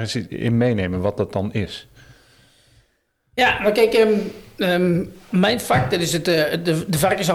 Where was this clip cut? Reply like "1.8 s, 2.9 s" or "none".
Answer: none